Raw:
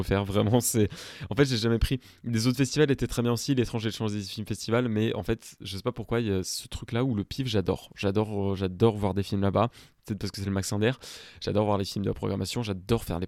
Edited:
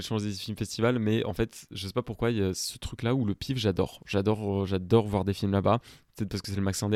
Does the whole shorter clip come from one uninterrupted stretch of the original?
yes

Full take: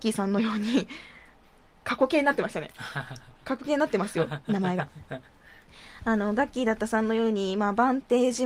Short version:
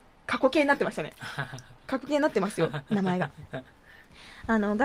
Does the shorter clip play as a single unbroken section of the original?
yes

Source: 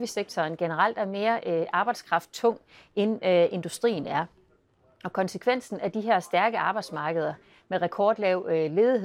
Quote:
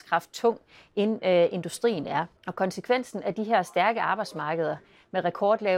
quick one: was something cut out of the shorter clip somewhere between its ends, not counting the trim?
yes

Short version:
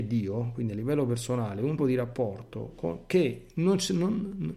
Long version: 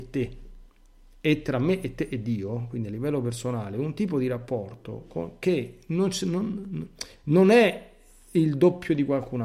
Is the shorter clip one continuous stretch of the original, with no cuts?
no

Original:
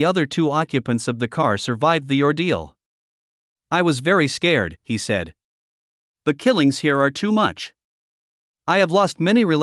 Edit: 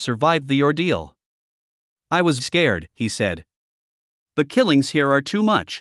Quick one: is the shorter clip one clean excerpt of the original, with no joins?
no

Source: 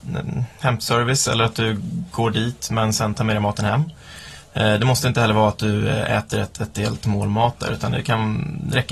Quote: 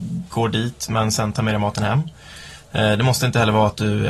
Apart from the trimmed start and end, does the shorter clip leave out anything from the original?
no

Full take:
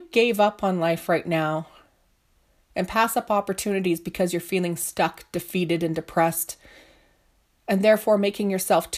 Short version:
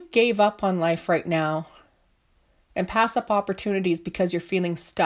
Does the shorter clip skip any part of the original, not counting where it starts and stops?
no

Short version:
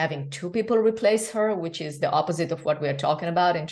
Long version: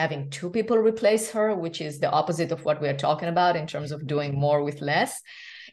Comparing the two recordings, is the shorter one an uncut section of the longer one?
yes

